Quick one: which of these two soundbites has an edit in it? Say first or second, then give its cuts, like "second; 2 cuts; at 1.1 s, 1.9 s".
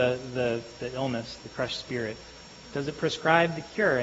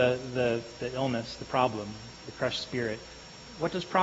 first; 2 cuts; at 1.4 s, 2.7 s